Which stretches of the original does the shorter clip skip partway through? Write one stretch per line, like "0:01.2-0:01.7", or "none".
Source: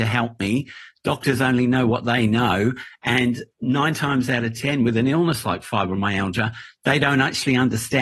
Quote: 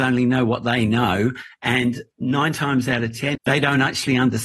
0:04.8-0:06.7